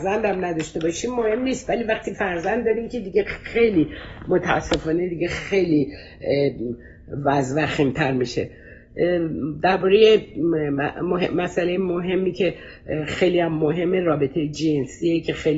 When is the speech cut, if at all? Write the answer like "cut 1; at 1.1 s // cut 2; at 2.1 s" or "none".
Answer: none